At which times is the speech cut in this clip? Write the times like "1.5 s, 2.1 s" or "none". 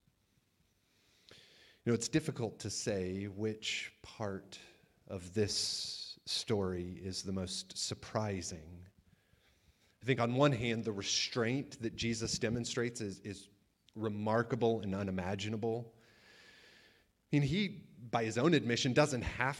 none